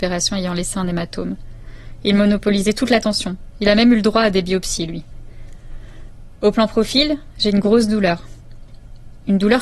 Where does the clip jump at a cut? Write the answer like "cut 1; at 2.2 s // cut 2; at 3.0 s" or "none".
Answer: none